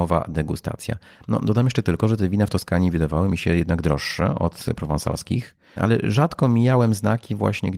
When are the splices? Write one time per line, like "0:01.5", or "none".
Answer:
0:01.2
0:05.8